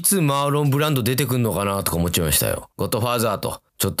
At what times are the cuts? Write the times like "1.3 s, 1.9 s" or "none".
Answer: 2.7 s